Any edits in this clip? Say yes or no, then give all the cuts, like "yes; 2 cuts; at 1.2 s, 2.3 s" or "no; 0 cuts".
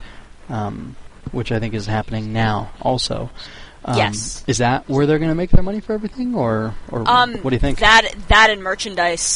no; 0 cuts